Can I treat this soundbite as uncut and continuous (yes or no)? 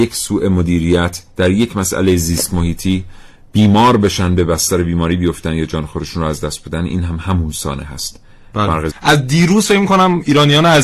no